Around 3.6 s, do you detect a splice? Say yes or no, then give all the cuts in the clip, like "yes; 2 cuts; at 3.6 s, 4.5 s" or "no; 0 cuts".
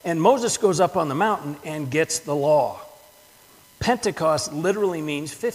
yes; 1 cut; at 3.6 s